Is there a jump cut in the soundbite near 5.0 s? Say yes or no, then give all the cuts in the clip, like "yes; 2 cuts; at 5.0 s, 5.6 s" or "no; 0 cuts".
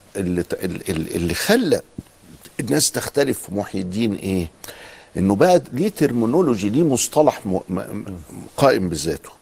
no; 0 cuts